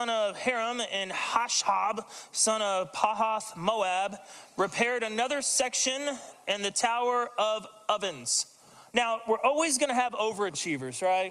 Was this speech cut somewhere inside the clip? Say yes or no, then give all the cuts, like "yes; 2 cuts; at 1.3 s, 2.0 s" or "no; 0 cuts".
yes; 1 cut; at 8.9 s